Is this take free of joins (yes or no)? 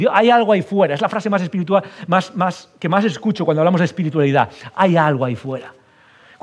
yes